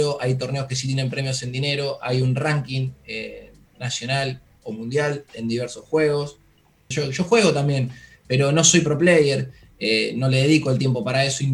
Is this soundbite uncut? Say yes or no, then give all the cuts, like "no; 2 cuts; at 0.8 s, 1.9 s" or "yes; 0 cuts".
no; 1 cut; at 6.9 s